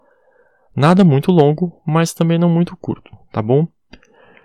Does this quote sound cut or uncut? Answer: uncut